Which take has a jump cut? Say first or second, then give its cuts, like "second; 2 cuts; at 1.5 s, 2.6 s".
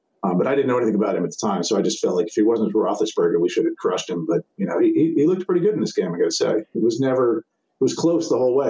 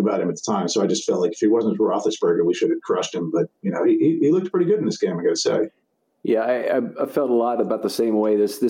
first; 1 cut; at 6.7 s